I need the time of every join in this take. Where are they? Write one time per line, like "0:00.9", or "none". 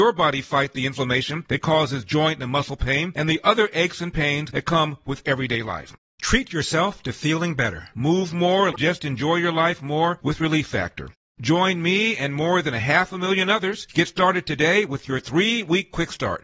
0:08.7